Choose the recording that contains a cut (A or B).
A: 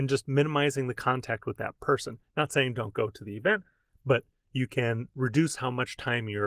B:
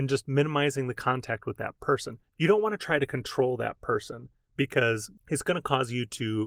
B